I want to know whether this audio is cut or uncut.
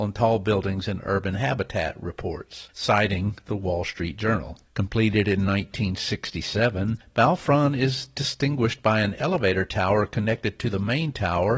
cut